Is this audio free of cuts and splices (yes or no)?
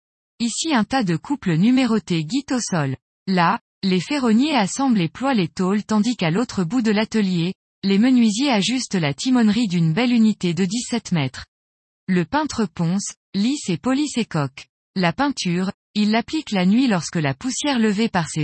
yes